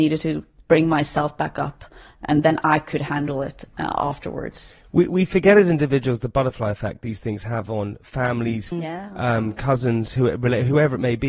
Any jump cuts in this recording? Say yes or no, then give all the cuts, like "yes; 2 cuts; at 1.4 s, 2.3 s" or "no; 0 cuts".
yes; 1 cut; at 8.7 s